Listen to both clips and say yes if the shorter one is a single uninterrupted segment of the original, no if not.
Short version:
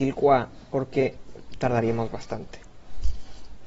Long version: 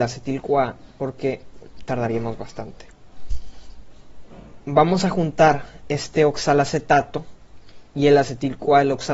yes